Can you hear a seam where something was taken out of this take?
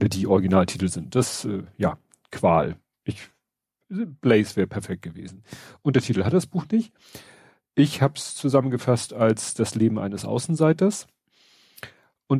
yes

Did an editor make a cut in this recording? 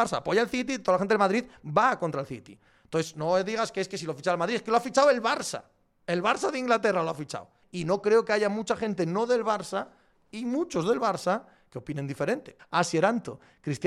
yes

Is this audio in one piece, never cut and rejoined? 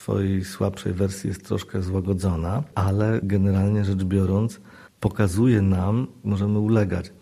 no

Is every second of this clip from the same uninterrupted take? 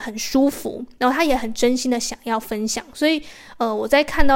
yes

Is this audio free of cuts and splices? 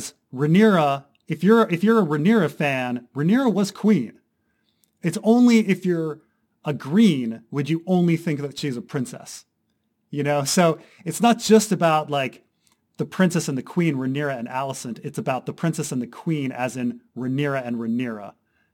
yes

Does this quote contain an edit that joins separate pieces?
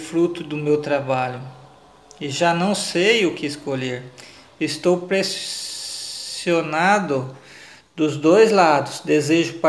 no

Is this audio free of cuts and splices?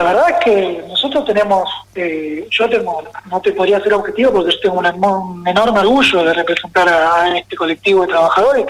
yes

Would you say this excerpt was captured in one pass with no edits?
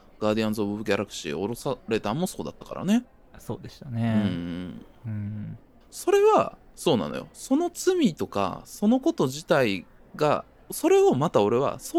yes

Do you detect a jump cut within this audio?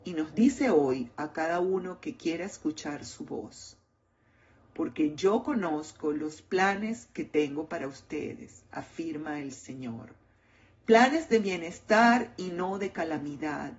no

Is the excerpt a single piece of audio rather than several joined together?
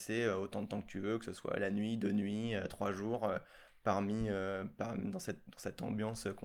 yes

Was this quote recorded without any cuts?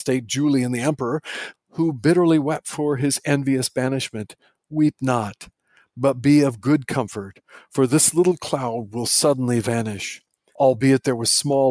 no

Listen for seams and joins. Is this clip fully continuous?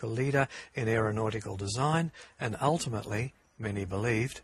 yes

